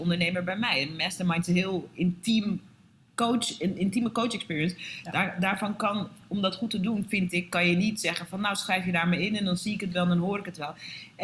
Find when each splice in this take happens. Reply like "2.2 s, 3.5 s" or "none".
none